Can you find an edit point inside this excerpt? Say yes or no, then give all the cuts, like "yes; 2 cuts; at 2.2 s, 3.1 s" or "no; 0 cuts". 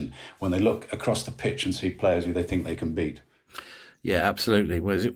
no; 0 cuts